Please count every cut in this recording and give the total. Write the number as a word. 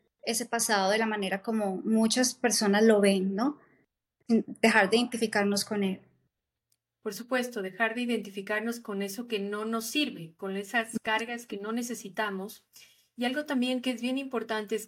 zero